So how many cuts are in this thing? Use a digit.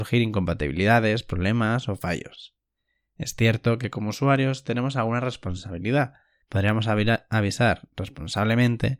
1